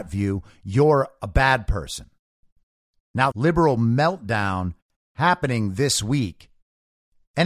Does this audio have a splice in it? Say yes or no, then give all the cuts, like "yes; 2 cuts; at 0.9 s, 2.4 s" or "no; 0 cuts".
yes; 1 cut; at 3.3 s